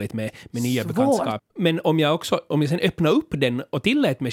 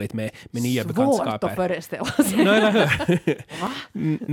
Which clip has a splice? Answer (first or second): first